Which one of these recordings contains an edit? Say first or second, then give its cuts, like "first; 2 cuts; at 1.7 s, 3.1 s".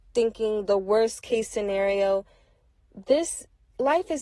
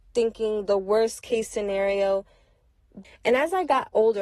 second; 1 cut; at 3.0 s